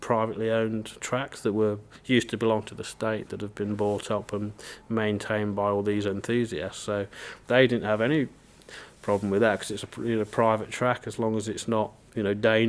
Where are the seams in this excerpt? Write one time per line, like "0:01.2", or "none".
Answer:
none